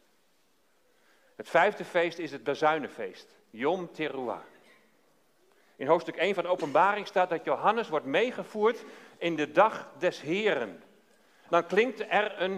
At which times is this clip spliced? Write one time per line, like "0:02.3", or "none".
0:11.5